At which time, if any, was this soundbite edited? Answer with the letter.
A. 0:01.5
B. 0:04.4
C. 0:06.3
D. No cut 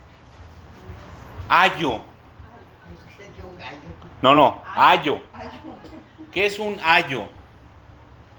D